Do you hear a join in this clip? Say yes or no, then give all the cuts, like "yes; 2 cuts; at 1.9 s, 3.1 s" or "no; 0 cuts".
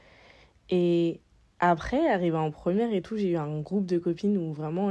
no; 0 cuts